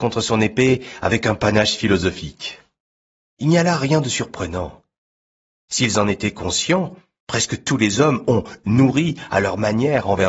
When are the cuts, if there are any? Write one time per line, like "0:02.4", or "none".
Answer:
0:03.2
0:08.6